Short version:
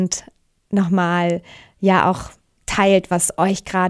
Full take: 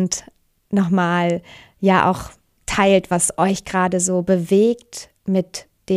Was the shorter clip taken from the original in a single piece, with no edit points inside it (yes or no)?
yes